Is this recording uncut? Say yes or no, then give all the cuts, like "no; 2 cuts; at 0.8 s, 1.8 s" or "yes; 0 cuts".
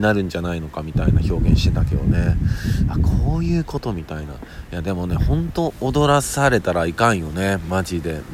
yes; 0 cuts